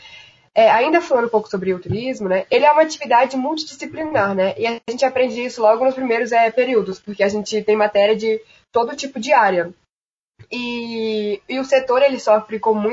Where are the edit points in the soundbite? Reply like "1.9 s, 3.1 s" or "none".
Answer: none